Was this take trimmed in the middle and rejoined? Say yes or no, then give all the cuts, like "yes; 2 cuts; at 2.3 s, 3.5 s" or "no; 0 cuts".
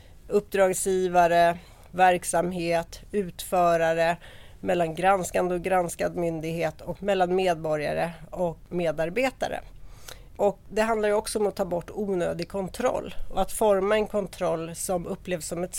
no; 0 cuts